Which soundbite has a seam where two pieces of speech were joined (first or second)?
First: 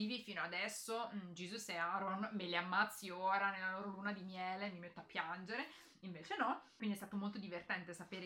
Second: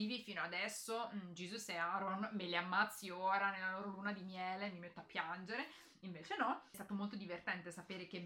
second